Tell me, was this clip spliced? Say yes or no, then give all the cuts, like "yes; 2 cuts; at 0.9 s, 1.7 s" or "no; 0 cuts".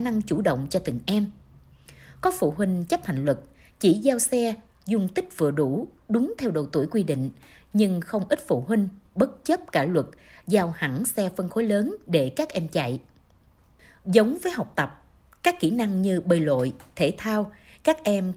yes; 1 cut; at 14.0 s